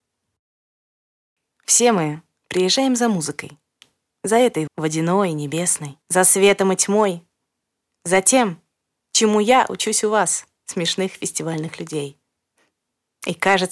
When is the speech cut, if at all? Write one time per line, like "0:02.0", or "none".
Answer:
0:04.7
0:06.0